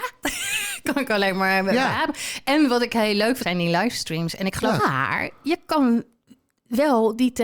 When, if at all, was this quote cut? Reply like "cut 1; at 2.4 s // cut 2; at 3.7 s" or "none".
cut 1; at 3.4 s // cut 2; at 4.8 s

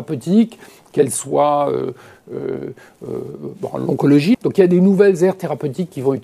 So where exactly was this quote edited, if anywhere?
cut 1; at 4.3 s

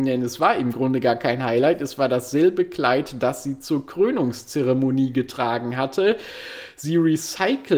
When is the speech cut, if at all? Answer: none

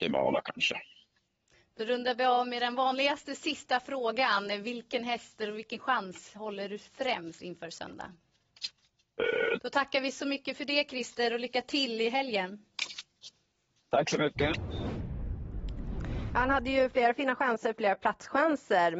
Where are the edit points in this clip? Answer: cut 1; at 9.6 s

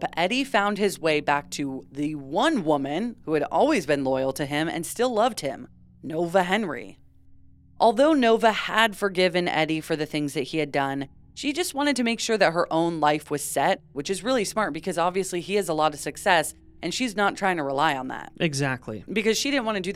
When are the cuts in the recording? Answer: cut 1; at 13.9 s

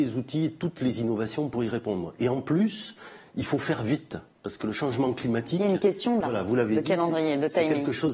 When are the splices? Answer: cut 1; at 6.2 s

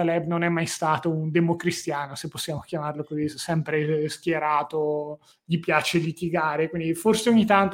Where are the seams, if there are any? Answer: none

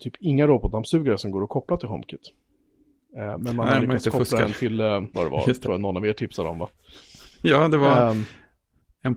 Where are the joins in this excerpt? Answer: cut 1; at 5.1 s

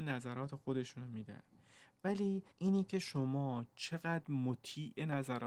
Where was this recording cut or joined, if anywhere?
cut 1; at 2.5 s

